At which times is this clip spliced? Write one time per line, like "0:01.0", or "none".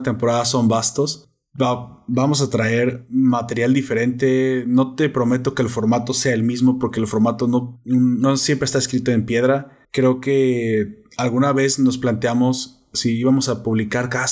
0:09.8